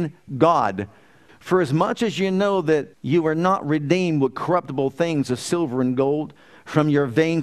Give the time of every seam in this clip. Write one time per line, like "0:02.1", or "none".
0:01.3
0:02.9